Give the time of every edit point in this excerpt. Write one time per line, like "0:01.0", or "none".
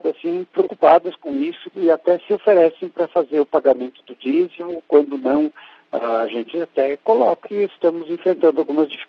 0:01.7
0:07.4